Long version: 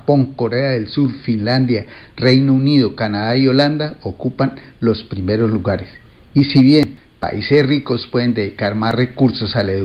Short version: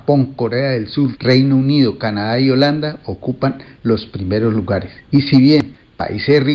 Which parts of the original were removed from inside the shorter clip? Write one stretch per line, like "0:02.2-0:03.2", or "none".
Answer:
0:01.1-0:02.1
0:06.0-0:06.2